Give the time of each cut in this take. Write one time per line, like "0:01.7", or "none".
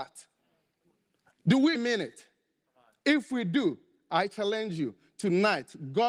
0:01.7